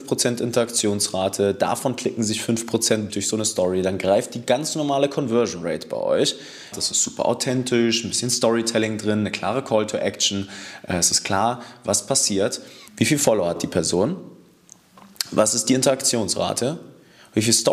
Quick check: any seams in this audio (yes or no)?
yes